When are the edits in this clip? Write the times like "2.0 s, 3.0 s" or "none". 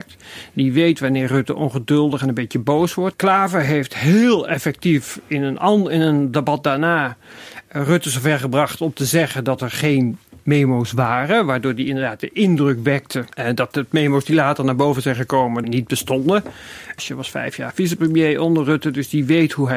3.1 s, 15.6 s, 17.0 s